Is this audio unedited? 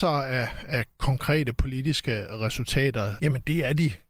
no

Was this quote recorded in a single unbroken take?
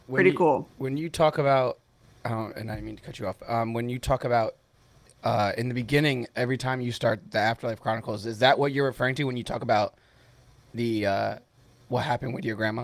yes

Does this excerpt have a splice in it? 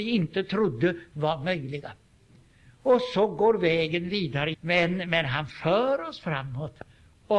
yes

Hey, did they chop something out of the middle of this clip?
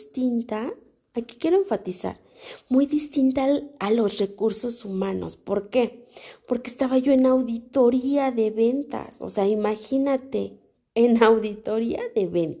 yes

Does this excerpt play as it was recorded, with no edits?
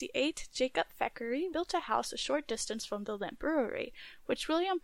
no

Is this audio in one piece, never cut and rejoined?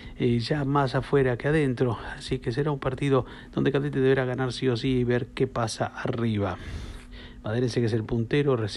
yes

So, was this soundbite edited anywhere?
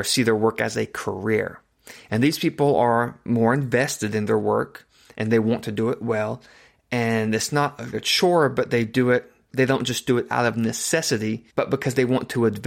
yes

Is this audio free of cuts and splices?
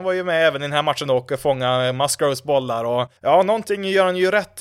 no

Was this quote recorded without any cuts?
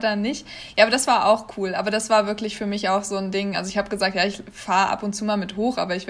yes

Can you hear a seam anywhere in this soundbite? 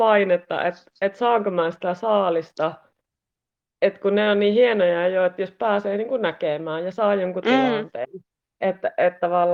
no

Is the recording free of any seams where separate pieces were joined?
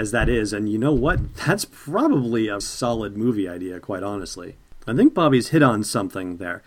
no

